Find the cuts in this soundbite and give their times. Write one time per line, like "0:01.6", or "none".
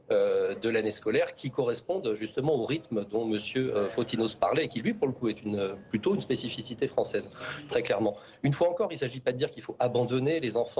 none

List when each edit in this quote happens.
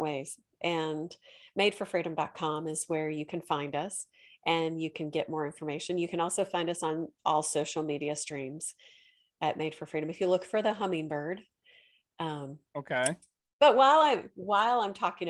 none

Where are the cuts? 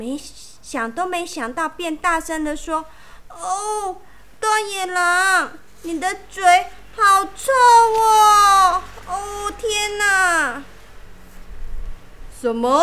none

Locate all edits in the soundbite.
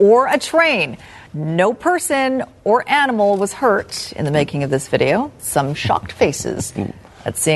0:01.3
0:05.4

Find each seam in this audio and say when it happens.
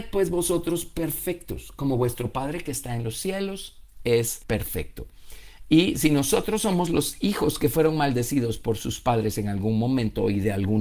0:04.4

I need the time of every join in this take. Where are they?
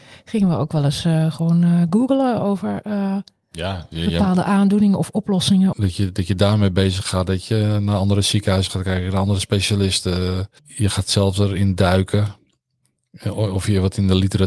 0:05.7
0:10.6

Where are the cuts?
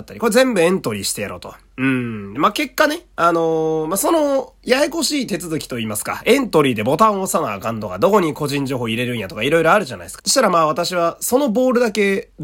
0:02.4
0:10.2

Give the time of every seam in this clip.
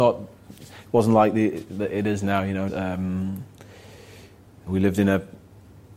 0:02.7
0:04.7

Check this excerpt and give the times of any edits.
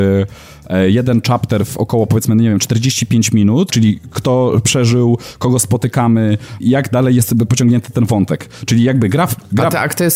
0:03.7
0:06.6

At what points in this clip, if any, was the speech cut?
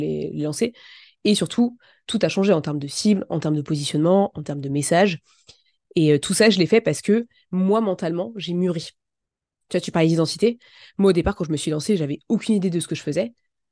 none

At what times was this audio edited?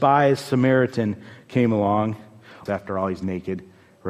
0:02.7

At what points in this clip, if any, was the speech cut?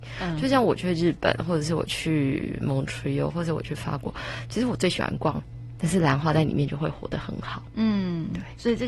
0:05.8

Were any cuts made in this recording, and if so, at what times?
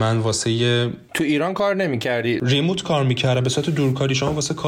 0:01.1

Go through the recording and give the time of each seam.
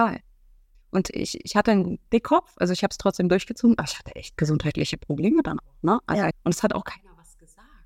0:06.3

